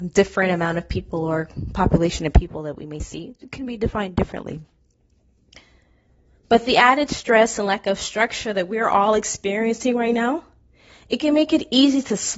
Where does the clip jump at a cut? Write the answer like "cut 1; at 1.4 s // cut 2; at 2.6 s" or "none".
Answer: none

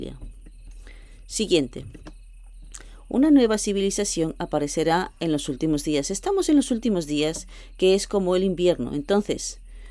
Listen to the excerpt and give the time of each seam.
none

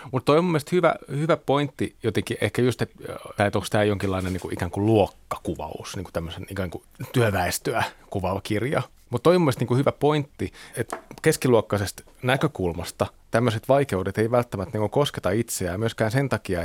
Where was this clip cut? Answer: cut 1; at 3.4 s // cut 2; at 10.7 s

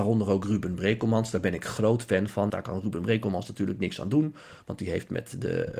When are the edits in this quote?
cut 1; at 2.5 s

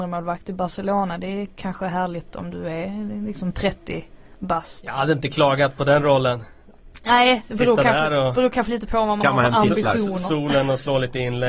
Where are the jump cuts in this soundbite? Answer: none

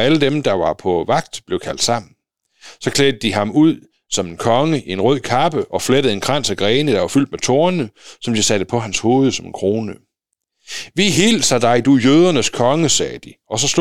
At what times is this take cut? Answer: none

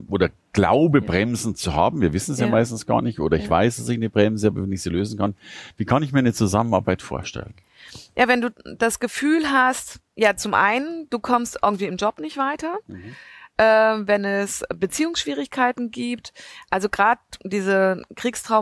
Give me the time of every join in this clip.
none

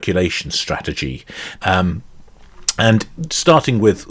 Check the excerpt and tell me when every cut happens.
cut 1; at 1.6 s

